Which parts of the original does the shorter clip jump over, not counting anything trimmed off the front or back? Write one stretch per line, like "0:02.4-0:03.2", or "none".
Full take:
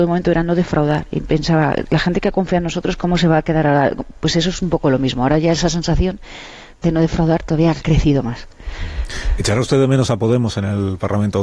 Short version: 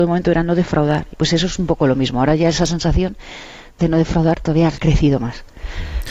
0:01.1-0:04.1

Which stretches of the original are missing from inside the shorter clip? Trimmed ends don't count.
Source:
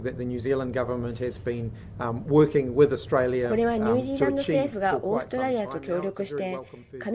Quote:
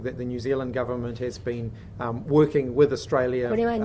none

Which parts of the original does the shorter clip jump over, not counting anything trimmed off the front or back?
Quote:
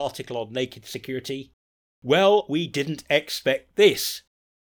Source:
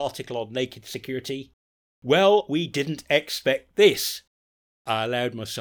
none

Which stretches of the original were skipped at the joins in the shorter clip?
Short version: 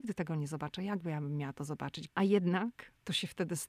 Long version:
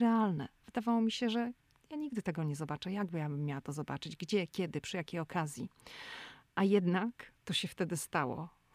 0:04.2-0:06.5

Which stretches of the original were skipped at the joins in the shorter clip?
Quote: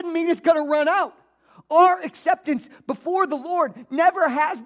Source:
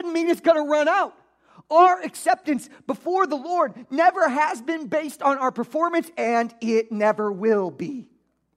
none

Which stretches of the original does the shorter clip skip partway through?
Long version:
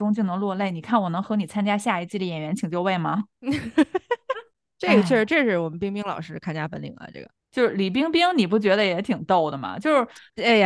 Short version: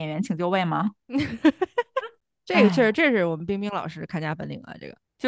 none

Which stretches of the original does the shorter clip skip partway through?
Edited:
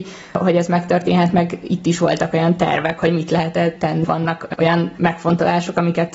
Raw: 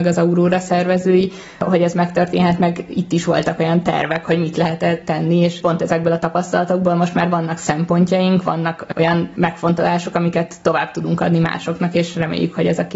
0:05.3-0:08.4

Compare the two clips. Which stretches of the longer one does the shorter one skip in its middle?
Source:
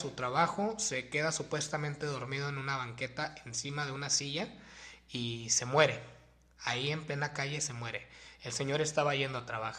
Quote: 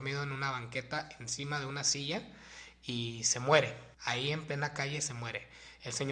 0:06.2-0:06.5

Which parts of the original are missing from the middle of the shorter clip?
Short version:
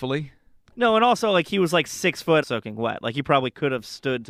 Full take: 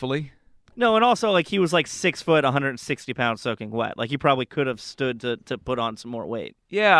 0:02.4-0:03.4

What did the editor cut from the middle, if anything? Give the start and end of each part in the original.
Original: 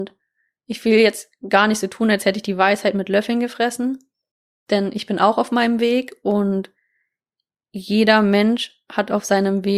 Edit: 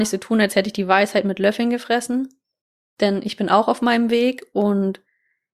none

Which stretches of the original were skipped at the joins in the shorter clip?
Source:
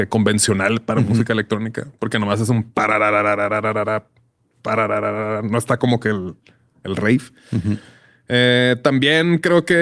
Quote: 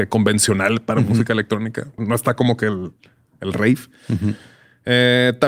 0:02.0-0:05.4

